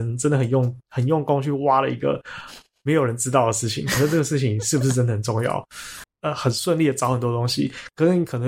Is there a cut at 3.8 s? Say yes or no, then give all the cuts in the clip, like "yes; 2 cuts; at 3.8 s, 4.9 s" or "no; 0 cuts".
no; 1 cut; at 6.0 s